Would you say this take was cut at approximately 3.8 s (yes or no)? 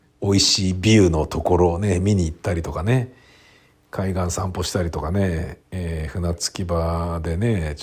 no